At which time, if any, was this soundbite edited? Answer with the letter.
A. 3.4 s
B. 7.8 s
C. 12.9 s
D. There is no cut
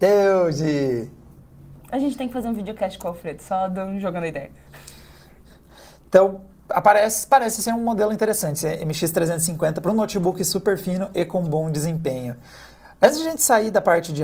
D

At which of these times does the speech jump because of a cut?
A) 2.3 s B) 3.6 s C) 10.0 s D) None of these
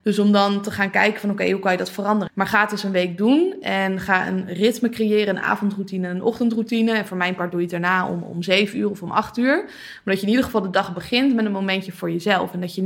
A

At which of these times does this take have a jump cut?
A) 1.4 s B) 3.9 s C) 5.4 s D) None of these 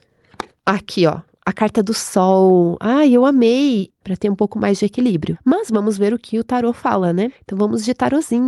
B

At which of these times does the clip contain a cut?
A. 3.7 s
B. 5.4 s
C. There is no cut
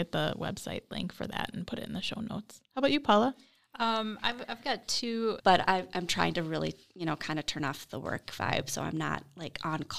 B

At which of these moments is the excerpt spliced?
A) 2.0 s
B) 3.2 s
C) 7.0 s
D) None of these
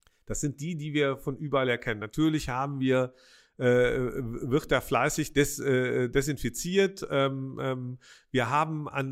D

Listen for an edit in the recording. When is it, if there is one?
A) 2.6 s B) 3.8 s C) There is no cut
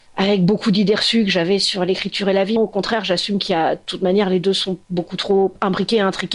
A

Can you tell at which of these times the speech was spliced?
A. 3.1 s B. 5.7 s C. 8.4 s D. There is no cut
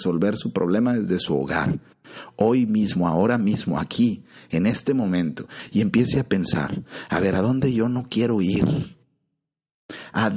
D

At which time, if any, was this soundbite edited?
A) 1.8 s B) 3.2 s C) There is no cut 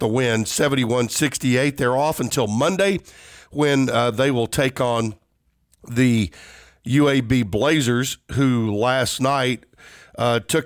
C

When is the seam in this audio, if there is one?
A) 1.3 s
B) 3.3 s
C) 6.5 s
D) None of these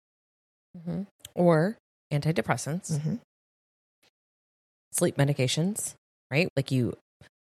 C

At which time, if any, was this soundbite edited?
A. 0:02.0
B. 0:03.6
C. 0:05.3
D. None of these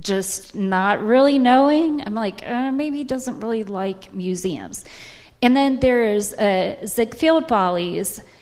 D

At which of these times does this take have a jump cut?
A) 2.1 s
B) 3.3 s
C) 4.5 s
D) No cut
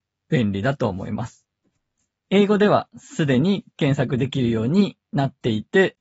A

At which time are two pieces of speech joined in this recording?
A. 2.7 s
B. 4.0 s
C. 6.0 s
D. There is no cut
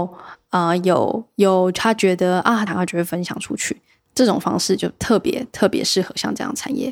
A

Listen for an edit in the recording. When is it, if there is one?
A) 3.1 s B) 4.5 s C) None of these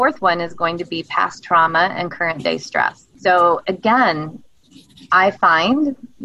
A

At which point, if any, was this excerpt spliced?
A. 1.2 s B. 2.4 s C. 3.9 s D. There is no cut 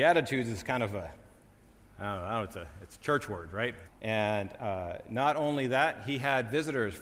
C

